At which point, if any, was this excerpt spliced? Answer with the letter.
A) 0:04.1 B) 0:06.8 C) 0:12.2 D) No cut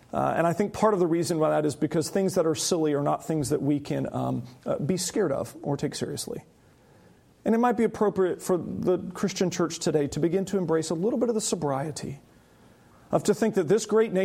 D